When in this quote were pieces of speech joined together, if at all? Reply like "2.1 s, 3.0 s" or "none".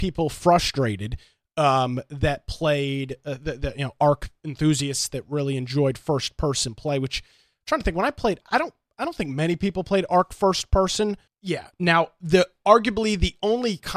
8.4 s, 11.3 s